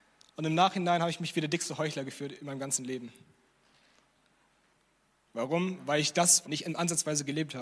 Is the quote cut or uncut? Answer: cut